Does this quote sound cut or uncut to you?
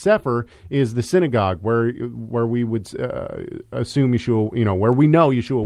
uncut